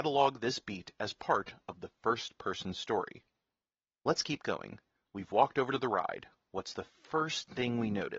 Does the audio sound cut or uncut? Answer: uncut